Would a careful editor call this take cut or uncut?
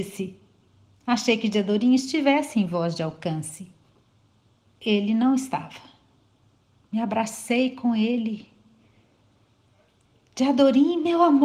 cut